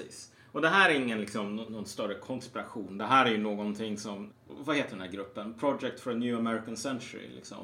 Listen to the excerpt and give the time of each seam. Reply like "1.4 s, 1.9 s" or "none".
4.3 s

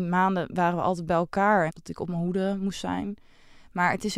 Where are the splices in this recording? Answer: 1.7 s

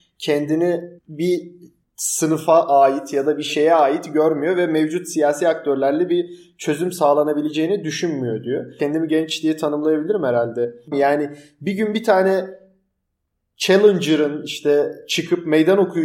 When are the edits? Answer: 10.9 s

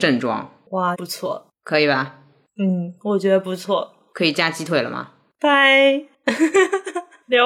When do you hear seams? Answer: 0.9 s, 5.3 s

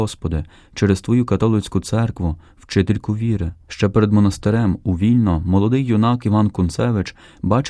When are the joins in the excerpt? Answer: 3.6 s

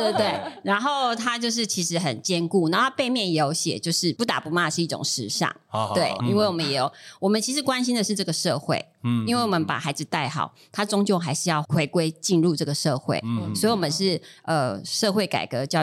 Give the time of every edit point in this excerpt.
6.2 s

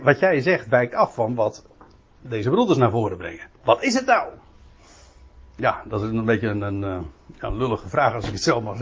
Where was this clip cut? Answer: none

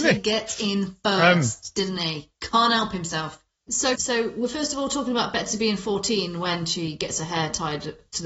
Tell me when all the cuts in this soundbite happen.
3.9 s

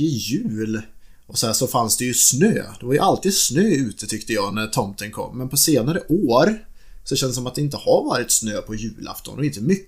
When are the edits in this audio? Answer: none

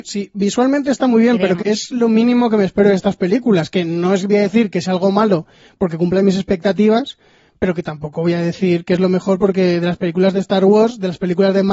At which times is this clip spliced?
1.6 s

